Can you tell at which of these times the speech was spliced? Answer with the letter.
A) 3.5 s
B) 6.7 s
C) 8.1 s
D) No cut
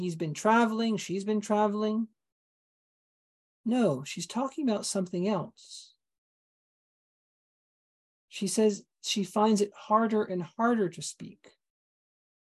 D